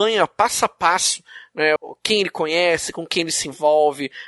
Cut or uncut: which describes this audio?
cut